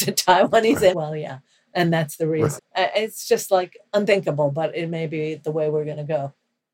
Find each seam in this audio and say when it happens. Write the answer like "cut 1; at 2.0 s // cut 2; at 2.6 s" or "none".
cut 1; at 0.9 s // cut 2; at 2.6 s // cut 3; at 3.9 s